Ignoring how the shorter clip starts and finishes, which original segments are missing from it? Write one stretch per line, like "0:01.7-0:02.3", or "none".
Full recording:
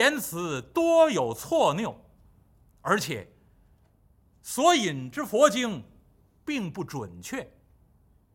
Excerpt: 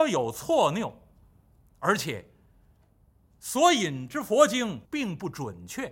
0:05.9-0:06.4